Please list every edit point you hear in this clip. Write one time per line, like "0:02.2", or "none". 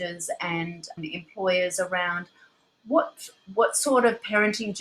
0:01.0